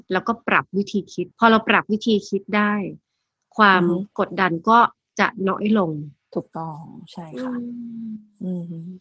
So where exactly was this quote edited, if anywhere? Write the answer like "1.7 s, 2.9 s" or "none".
1.3 s